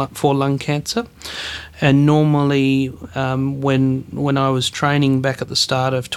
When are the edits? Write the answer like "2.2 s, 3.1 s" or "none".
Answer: none

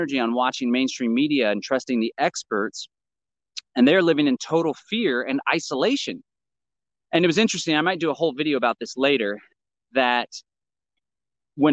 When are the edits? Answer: none

